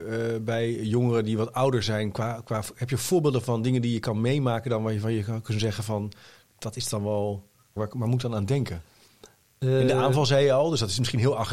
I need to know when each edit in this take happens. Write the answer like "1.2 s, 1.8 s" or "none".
7.8 s